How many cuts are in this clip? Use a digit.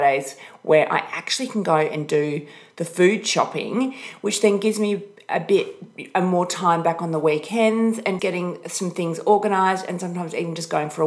1